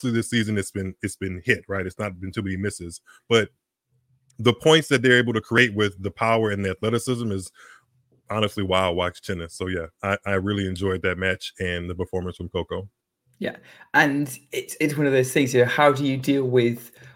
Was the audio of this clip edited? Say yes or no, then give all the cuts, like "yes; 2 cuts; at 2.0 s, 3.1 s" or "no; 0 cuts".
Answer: no; 0 cuts